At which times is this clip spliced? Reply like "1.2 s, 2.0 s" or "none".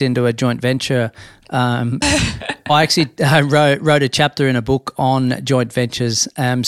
2.0 s

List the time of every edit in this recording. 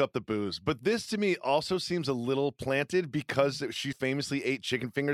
3.9 s

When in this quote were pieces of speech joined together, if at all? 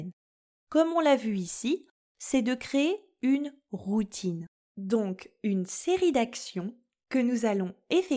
2.1 s

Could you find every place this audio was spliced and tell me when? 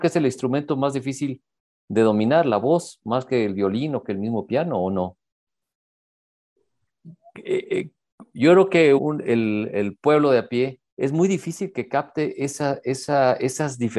6.9 s, 9.0 s, 10.9 s

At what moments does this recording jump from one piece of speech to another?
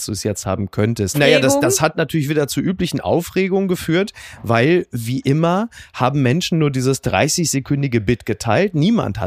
1.1 s

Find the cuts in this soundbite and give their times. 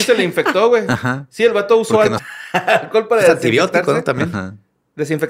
2.2 s

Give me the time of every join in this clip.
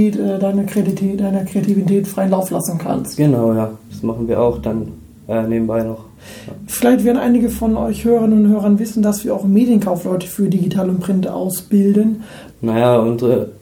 3.9 s, 12.5 s

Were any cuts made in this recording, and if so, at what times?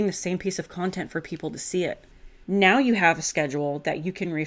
2.4 s

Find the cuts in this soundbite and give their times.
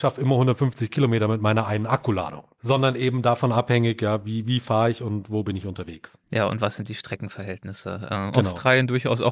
6.2 s, 8.3 s

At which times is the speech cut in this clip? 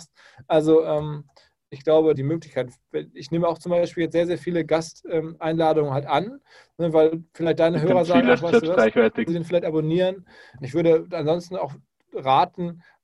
2.1 s, 9.3 s, 10.6 s

